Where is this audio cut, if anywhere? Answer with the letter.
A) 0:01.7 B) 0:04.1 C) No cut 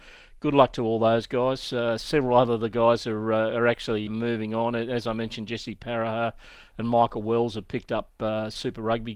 B